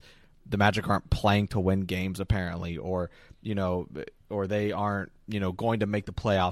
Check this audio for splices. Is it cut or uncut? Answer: uncut